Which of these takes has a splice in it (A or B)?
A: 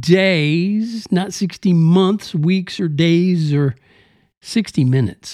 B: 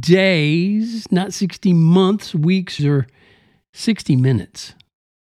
B